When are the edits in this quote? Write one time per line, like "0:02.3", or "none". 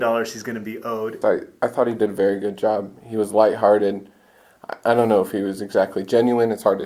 0:01.2